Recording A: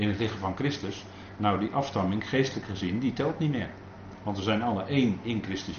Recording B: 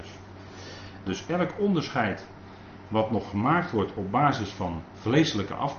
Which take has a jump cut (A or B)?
B